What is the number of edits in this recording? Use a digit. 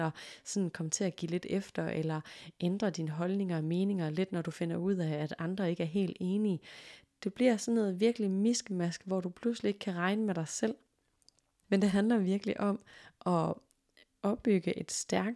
1